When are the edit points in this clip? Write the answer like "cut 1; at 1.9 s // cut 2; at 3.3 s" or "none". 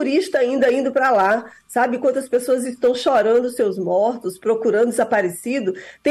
none